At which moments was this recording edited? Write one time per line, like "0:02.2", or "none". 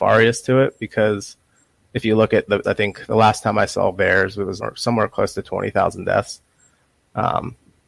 0:02.6
0:04.6